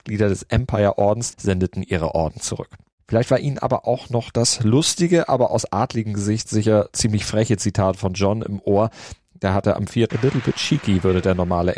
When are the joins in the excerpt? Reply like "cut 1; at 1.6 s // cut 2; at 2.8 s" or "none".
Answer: cut 1; at 1.3 s // cut 2; at 10.1 s